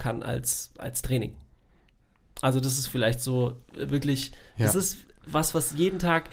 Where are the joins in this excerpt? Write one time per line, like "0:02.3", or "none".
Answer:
none